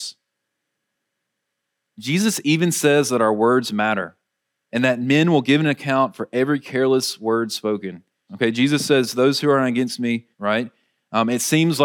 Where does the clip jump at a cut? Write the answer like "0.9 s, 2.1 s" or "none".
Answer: 8.3 s, 10.3 s